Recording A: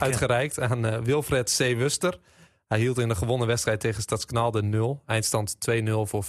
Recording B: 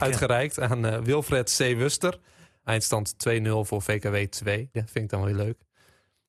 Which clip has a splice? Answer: B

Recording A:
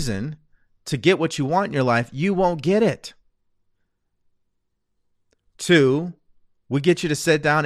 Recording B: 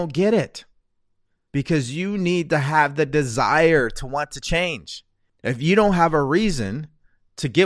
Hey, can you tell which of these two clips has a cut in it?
B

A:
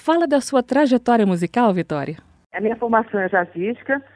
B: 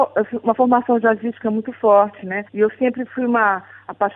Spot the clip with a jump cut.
B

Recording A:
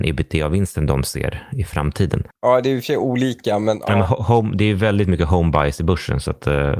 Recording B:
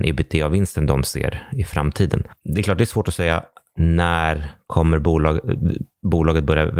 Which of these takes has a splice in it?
A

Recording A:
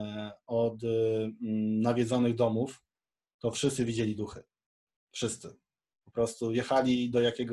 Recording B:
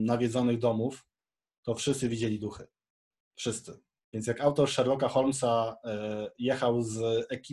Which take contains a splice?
B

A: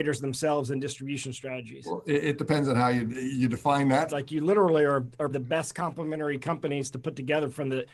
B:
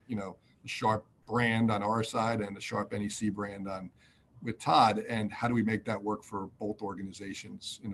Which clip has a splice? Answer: A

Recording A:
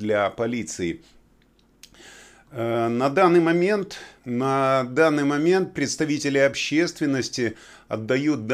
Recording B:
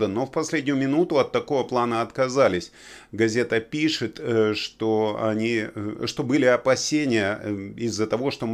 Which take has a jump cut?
A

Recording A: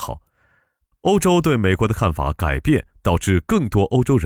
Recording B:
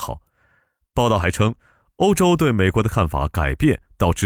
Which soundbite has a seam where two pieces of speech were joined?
A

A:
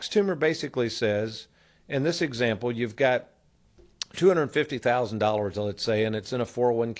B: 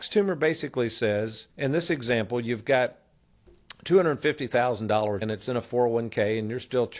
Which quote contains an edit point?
B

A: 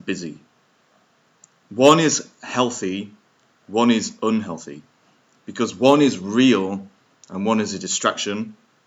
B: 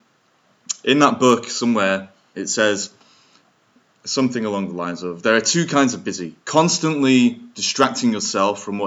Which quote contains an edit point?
B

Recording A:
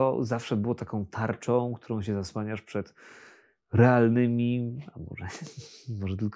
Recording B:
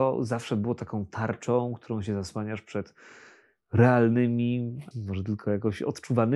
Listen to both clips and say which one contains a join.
B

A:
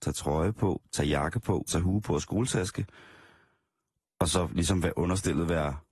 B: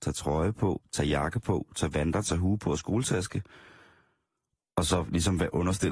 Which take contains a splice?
A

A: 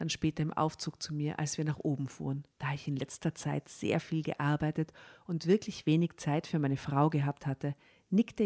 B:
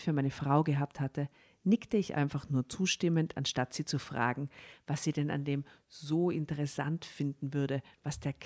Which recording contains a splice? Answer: A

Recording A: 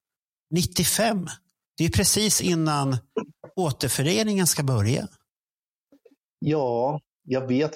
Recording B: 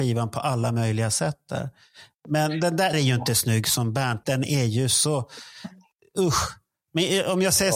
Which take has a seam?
B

